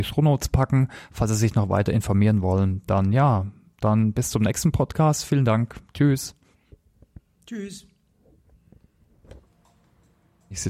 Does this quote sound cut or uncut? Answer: uncut